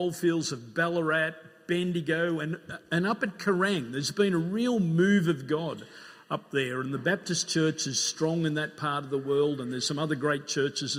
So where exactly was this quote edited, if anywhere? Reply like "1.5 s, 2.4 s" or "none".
none